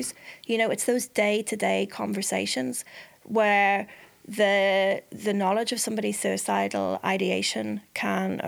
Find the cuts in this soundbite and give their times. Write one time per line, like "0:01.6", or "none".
none

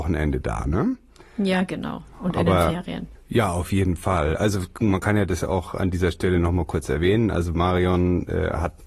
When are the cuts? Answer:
0:03.2

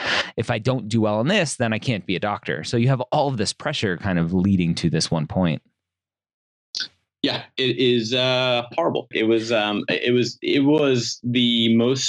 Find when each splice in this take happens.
0:09.1

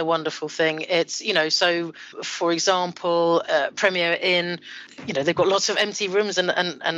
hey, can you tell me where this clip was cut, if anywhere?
0:03.4

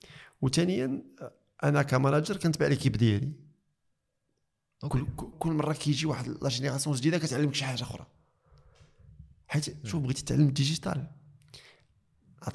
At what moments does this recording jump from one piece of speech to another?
0:05.3

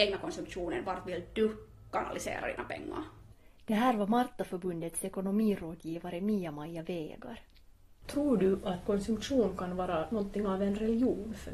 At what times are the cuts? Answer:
0:08.0

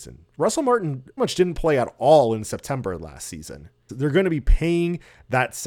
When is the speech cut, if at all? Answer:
0:01.2
0:03.9

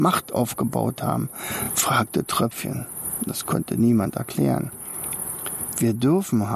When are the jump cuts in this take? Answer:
none

